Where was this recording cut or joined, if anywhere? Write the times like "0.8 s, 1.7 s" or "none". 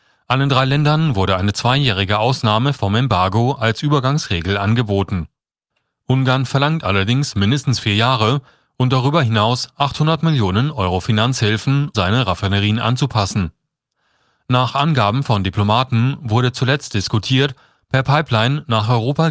11.9 s